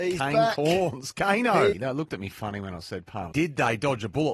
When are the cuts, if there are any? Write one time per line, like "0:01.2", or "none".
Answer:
0:01.7
0:03.3

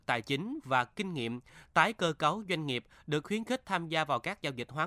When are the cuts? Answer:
none

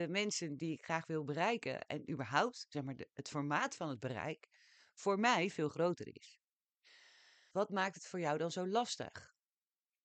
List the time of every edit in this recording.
0:07.5

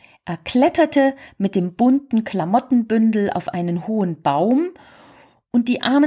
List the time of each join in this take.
none

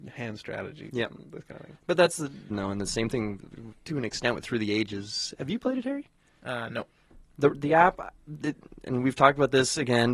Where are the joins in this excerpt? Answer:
0:02.5

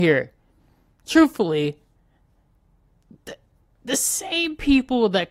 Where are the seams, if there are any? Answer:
none

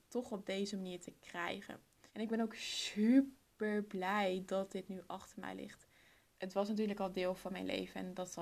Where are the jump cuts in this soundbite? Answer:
0:02.1
0:06.3

